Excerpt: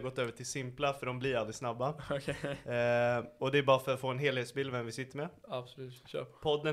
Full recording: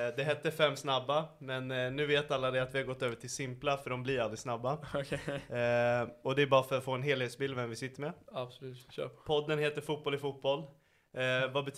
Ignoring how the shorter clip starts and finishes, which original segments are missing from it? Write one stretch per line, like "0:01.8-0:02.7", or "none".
none